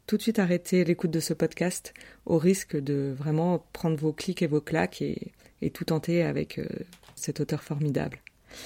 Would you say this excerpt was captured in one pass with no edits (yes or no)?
yes